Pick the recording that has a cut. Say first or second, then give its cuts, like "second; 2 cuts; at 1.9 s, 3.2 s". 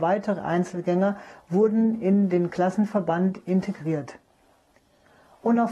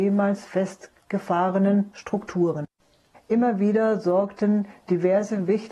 second; 1 cut; at 3.1 s